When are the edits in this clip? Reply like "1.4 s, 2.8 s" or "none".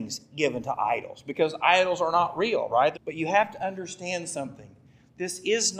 2.9 s